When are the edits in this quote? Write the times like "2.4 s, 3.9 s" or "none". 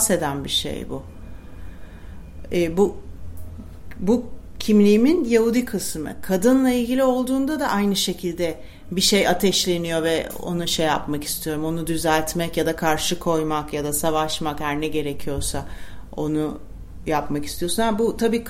none